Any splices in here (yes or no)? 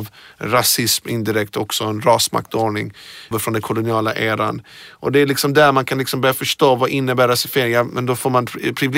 yes